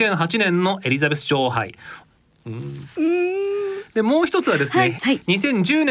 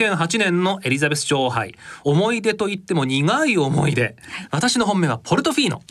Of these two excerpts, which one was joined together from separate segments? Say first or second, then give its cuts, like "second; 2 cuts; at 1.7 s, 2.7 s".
first; 2 cuts; at 2.0 s, 4.9 s